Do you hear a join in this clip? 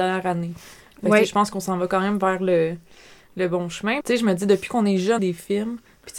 yes; 2 cuts; at 4.0 s, 5.2 s

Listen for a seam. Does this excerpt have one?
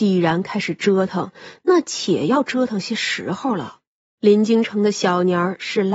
yes; 1 cut; at 4.2 s

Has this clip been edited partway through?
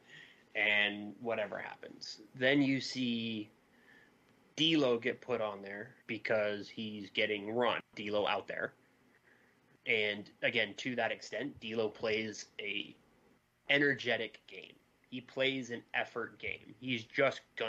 yes; 1 cut; at 6.0 s

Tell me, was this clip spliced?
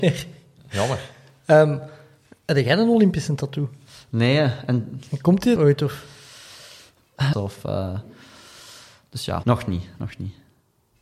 yes; 3 cuts; at 5.6 s, 7.3 s, 9.4 s

